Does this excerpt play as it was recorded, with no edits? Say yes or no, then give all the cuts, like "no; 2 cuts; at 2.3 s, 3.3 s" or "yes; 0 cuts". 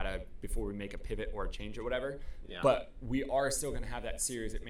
yes; 0 cuts